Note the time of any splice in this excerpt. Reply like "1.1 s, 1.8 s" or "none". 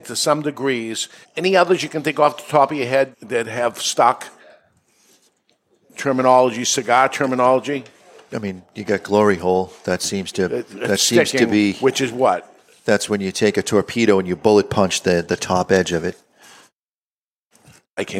1.2 s, 3.1 s